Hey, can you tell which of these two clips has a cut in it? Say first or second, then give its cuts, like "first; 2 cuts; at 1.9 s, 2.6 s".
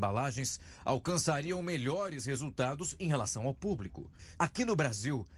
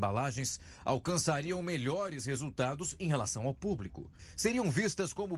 first; 1 cut; at 4.3 s